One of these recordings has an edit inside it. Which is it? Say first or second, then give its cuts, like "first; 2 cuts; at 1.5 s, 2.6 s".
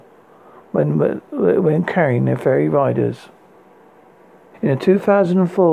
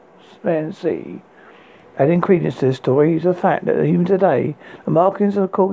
first; 1 cut; at 4.5 s